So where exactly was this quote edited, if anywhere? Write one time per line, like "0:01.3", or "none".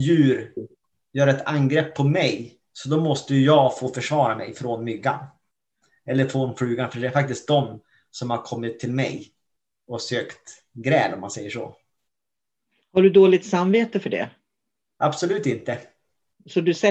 none